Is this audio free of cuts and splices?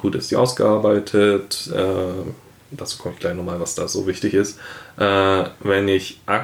yes; 0 cuts

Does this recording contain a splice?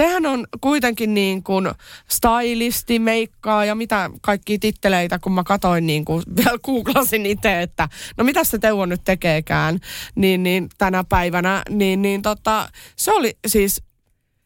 no; 0 cuts

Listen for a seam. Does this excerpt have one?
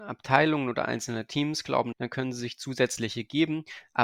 yes; 1 cut; at 1.9 s

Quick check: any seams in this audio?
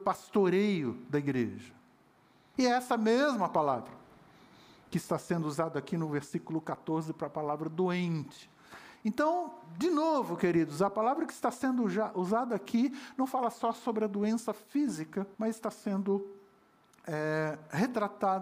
yes; 2 cuts; at 2.5 s, 15.3 s

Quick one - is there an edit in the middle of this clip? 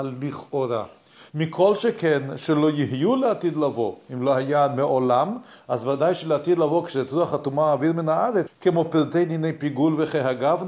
yes; 2 cuts; at 1.3 s, 8.5 s

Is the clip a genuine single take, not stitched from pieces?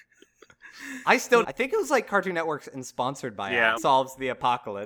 no; 2 cuts; at 1.4 s, 3.8 s

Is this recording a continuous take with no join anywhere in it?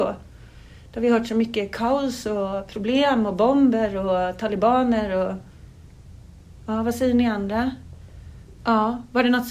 no; 1 cut; at 8.6 s

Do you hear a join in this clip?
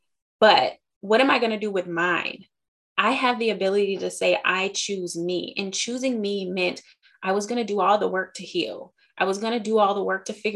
no; 0 cuts

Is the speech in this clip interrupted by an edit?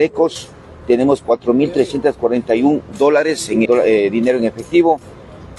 yes; 1 cut; at 3.6 s

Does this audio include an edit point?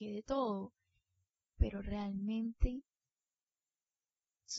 yes; 1 cut; at 1.4 s

